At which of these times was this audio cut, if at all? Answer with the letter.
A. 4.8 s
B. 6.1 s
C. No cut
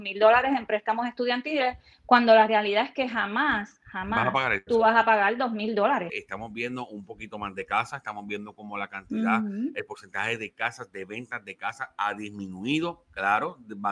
B